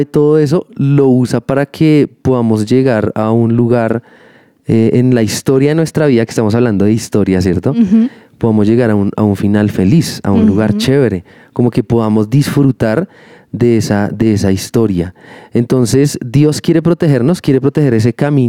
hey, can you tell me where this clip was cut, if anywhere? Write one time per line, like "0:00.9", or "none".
none